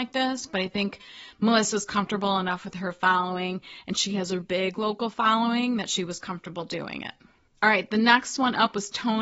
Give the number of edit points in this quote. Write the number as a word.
one